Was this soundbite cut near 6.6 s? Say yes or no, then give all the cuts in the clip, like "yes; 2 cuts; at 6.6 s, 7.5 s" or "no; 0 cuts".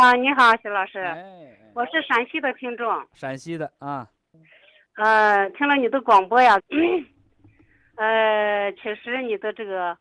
yes; 1 cut; at 6.6 s